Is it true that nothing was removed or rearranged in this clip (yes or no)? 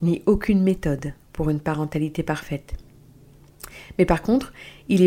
yes